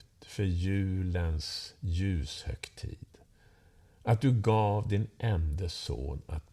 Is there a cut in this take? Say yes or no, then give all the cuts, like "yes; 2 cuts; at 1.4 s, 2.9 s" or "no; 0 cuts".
no; 0 cuts